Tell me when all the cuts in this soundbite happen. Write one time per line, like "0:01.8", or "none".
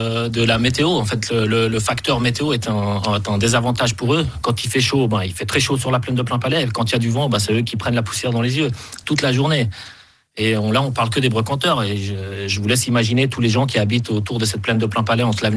none